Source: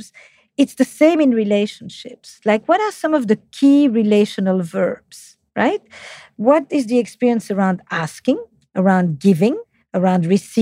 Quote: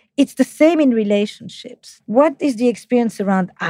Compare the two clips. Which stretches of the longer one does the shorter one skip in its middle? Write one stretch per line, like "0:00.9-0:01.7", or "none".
0:02.4-0:06.3